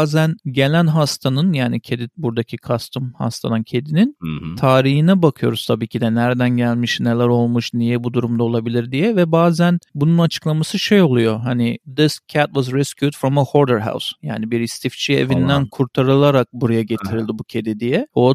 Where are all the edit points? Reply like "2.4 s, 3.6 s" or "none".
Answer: none